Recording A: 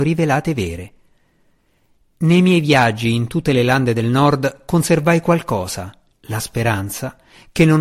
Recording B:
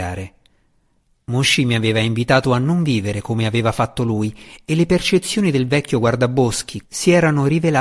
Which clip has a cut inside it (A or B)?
B